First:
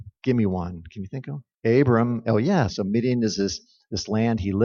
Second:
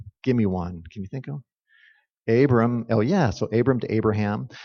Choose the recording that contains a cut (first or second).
first